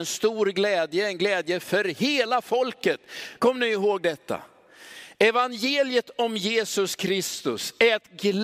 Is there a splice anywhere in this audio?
yes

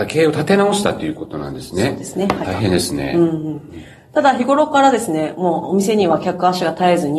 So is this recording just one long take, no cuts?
no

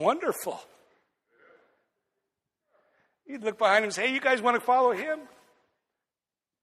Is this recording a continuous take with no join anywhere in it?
yes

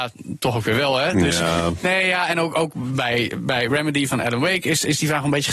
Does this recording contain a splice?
no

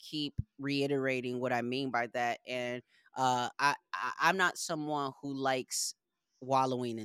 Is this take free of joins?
yes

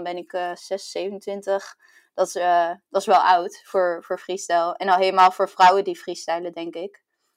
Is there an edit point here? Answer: no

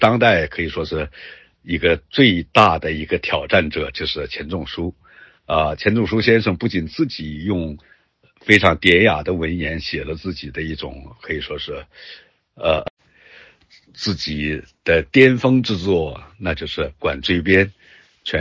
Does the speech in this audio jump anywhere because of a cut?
no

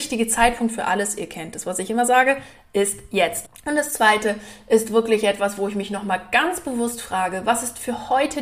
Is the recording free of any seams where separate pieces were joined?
no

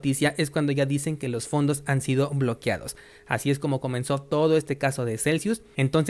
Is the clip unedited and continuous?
yes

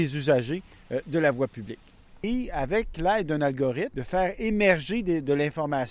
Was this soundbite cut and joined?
yes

